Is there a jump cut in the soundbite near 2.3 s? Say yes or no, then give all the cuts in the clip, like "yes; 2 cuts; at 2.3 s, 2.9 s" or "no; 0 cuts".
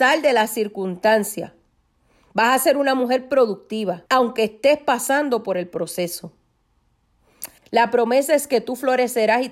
no; 2 cuts; at 4.1 s, 7.6 s